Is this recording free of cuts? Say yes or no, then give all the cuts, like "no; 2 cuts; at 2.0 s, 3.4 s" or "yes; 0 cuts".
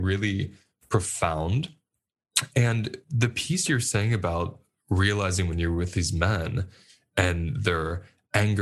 yes; 0 cuts